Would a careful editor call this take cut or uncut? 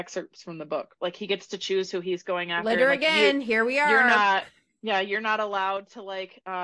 cut